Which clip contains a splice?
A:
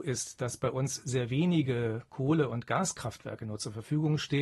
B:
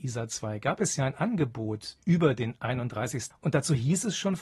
B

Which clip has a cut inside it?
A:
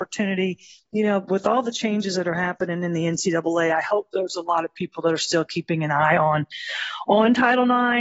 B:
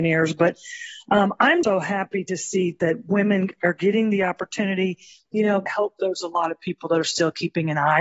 B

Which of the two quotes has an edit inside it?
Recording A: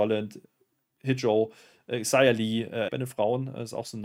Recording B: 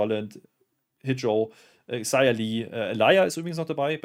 A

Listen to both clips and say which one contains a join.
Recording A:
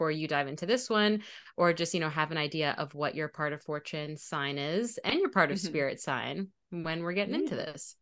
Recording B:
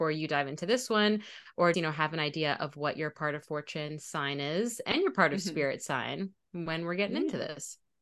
B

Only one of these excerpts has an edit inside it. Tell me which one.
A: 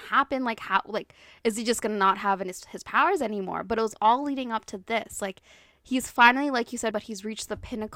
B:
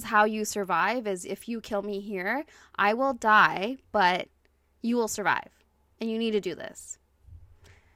A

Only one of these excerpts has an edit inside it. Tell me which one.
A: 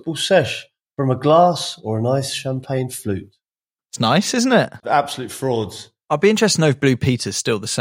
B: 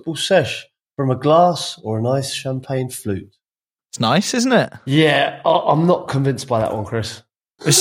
A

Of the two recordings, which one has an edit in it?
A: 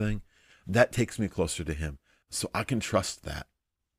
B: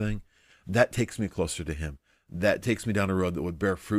A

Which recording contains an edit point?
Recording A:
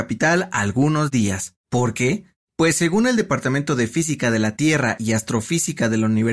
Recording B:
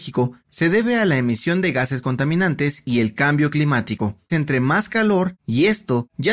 B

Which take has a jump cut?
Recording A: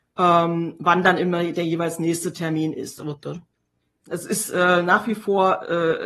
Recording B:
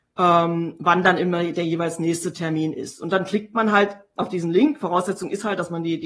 A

